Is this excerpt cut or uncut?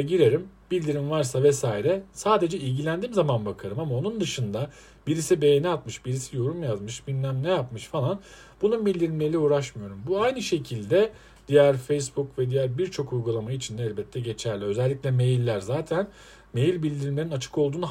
uncut